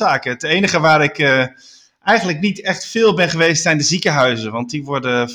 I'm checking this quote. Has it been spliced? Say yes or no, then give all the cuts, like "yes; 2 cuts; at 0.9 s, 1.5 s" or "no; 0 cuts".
no; 0 cuts